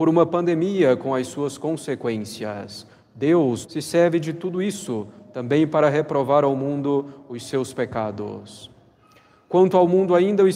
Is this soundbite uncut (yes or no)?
no